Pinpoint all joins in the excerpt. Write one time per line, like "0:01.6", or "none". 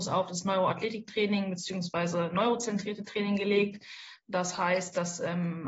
none